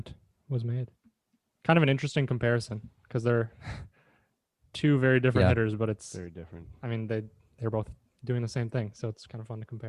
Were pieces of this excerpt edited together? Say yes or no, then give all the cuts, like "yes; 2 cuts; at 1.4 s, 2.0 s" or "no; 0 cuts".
yes; 1 cut; at 1.5 s